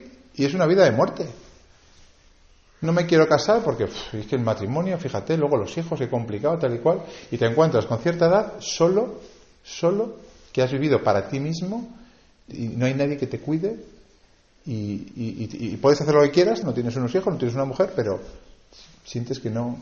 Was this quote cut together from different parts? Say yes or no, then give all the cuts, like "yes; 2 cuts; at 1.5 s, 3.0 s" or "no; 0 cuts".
yes; 3 cuts; at 2.8 s, 12.5 s, 16.6 s